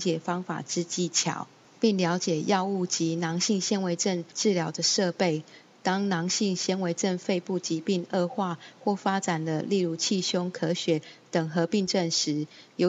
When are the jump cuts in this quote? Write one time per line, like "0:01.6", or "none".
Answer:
none